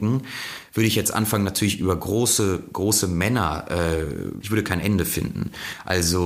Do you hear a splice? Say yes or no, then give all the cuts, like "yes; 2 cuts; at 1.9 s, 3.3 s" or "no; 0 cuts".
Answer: yes; 1 cut; at 4.4 s